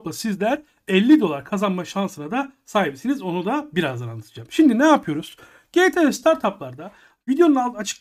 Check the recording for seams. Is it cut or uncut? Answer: uncut